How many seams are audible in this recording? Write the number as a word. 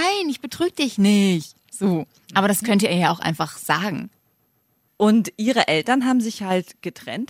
one